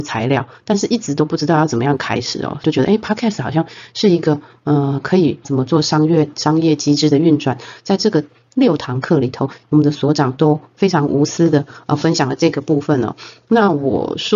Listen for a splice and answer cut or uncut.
cut